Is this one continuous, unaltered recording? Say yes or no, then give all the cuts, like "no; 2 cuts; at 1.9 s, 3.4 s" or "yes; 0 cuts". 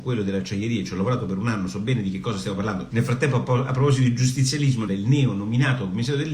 no; 2 cuts; at 2.9 s, 4.9 s